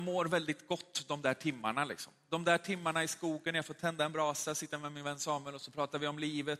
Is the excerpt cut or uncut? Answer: uncut